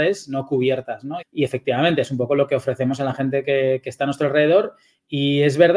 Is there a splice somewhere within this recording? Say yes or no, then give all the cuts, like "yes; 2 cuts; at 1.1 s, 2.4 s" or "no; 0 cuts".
yes; 1 cut; at 1.2 s